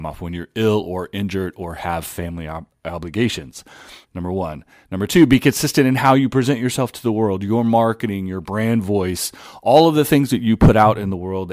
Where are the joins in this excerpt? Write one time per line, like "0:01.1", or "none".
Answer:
0:04.0